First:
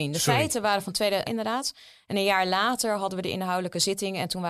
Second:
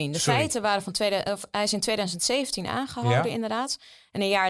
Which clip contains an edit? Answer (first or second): first